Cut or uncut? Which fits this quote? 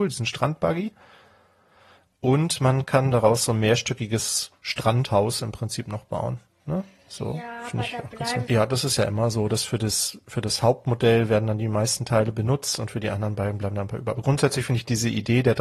cut